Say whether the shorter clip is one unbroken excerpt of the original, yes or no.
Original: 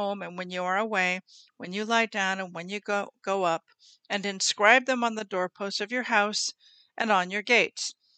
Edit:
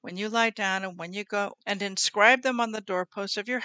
no